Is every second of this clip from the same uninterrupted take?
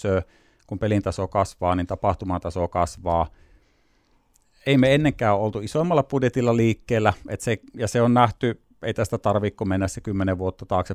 yes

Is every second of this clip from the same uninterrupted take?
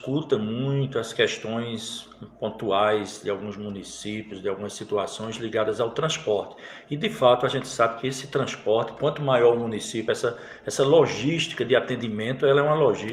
yes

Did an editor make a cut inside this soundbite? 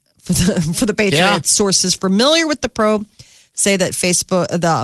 yes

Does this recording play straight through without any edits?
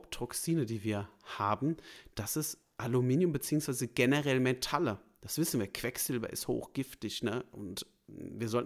yes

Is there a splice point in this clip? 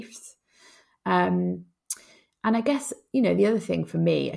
no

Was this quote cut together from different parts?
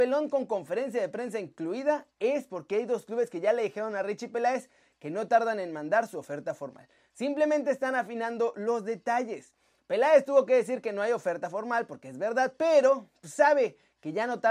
no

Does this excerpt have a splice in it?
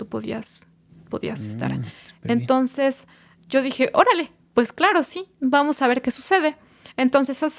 no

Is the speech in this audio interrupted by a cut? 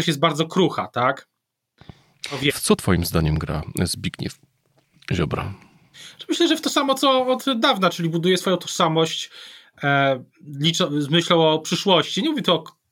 yes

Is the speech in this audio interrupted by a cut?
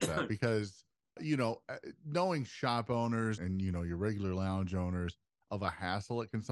yes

